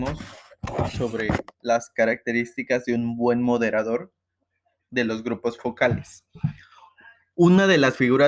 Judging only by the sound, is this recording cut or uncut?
uncut